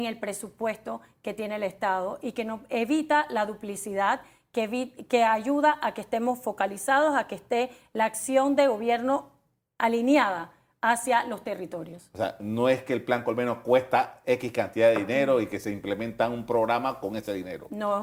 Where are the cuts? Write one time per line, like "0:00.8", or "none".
none